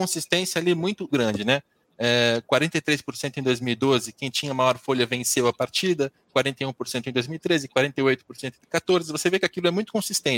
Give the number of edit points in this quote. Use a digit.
1